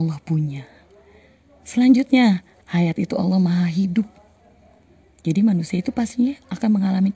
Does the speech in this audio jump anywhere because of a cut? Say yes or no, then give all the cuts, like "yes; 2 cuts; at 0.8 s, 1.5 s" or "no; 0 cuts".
yes; 1 cut; at 2.6 s